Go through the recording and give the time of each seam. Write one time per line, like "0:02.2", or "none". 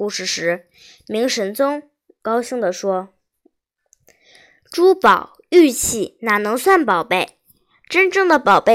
none